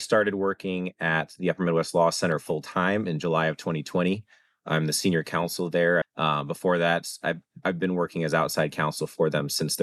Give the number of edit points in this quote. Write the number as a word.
one